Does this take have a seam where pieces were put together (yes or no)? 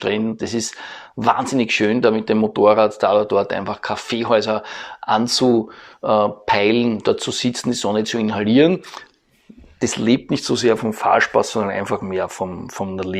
no